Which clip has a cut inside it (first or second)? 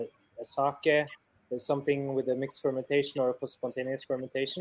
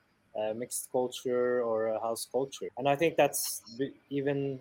second